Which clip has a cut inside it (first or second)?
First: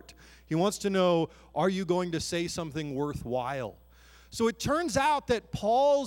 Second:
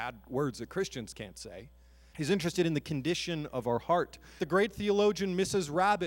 second